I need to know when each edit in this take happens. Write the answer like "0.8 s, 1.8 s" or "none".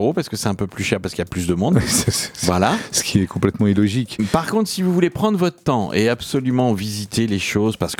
none